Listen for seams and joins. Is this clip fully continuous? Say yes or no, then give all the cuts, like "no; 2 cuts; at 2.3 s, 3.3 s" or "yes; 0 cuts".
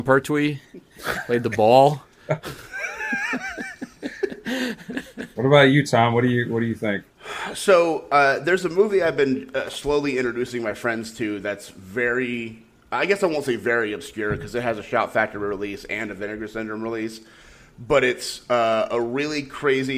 yes; 0 cuts